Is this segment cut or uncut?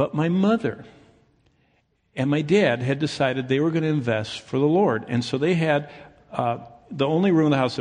uncut